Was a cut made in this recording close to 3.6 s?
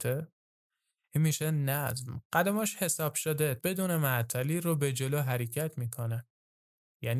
yes; 1 cut; at 3.6 s

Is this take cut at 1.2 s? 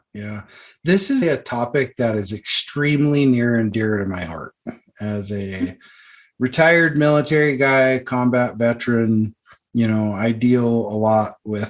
yes; 1 cut; at 1.2 s

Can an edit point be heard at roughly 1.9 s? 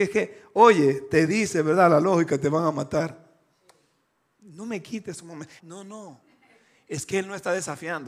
no; 2 cuts; at 4.4 s, 5.6 s

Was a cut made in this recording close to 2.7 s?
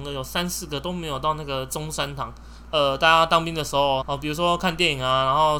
yes; 2 cuts; at 2.7 s, 4.0 s

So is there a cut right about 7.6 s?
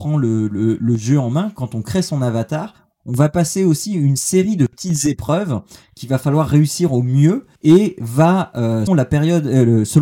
yes; 2 cuts; at 7.6 s, 8.9 s

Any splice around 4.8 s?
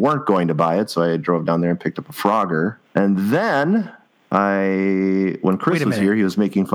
no; 1 cut; at 2.8 s

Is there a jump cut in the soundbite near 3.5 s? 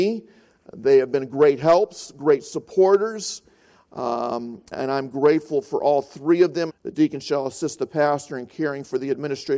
no; 2 cuts; at 4.7 s, 6.7 s

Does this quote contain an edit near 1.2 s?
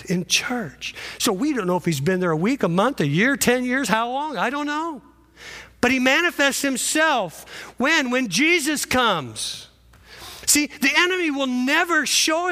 no; 0 cuts

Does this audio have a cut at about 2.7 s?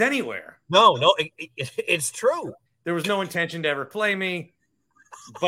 yes; 1 cut; at 2.7 s

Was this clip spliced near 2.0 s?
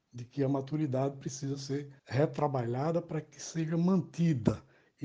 yes; 1 cut; at 2.0 s

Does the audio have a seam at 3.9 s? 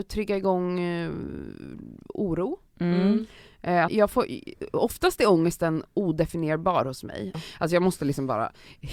yes; 2 cuts; at 3.9 s, 7.3 s

